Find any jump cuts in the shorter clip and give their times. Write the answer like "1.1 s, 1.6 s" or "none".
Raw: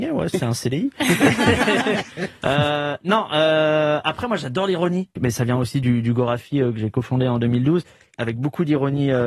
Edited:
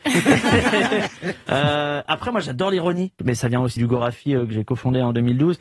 2.1 s, 3.8 s